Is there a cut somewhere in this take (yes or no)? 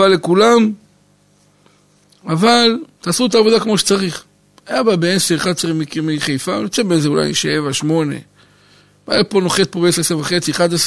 no